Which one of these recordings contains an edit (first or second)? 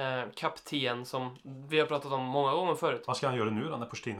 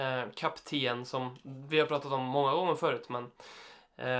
first